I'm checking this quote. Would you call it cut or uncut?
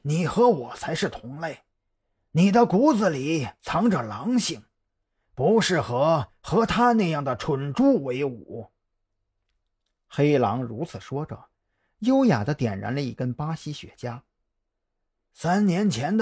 uncut